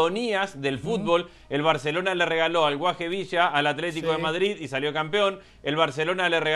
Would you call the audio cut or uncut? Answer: uncut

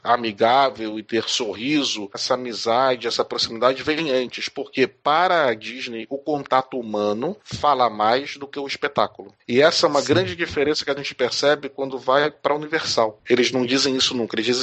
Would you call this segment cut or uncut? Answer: cut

